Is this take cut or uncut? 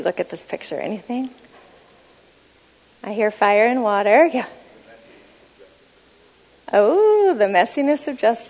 uncut